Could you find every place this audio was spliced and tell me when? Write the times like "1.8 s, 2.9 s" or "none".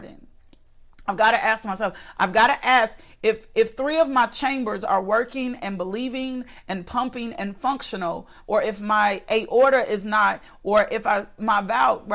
2.1 s, 8.4 s